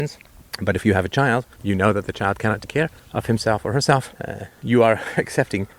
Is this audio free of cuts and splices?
no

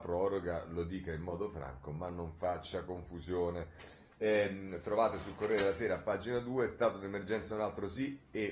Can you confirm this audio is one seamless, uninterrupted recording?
no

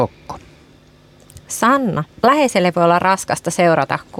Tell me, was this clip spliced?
yes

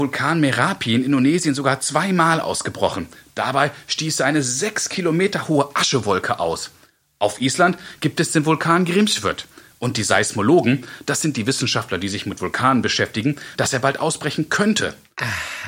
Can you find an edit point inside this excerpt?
yes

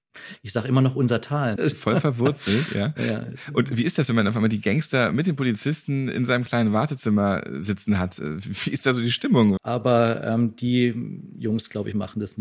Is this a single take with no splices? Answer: no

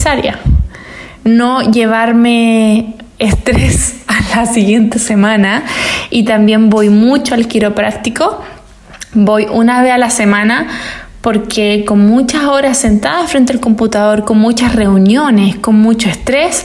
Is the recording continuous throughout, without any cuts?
yes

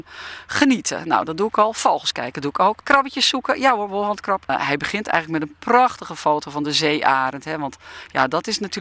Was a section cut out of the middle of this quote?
no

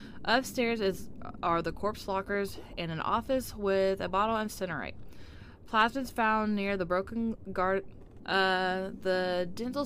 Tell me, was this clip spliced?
yes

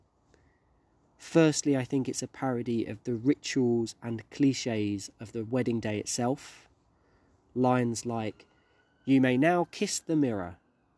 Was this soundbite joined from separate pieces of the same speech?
no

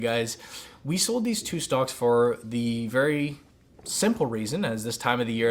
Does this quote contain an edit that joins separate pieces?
no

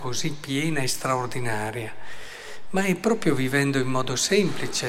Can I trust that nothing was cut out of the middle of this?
yes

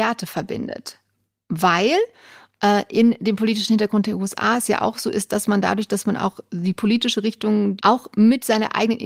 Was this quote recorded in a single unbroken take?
no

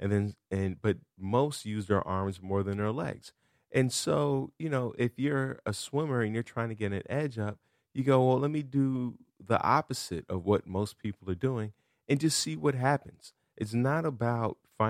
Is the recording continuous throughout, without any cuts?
yes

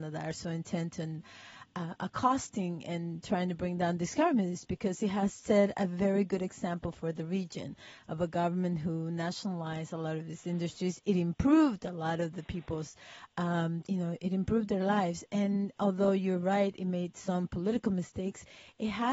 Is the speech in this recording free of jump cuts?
no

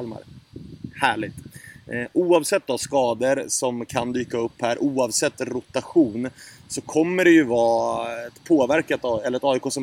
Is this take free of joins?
yes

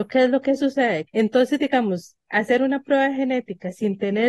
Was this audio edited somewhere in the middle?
yes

